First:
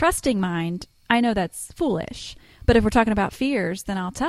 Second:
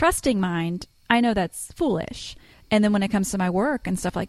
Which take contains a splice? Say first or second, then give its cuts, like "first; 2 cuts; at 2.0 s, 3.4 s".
second; 1 cut; at 2.5 s